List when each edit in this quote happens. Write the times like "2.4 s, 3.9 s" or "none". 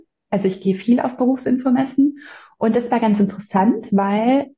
none